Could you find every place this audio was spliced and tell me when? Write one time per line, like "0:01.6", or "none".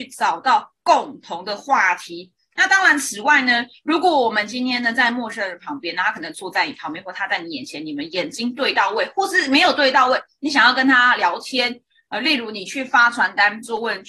none